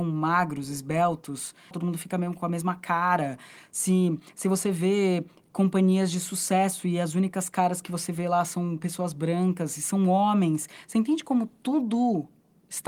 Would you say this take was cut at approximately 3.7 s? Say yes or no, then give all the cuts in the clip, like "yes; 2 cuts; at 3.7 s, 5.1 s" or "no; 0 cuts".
no; 1 cut; at 1.7 s